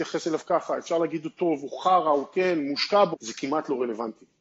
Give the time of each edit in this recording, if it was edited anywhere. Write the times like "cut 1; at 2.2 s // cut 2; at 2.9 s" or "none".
cut 1; at 3.1 s